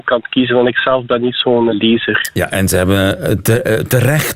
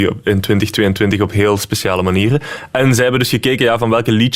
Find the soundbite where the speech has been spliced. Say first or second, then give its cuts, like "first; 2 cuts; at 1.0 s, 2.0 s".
first; 1 cut; at 1.7 s